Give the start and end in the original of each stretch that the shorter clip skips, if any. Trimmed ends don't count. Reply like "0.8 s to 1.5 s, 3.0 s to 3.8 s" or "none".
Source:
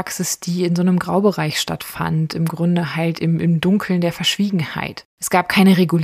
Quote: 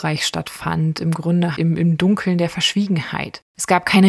2.9 s to 3.2 s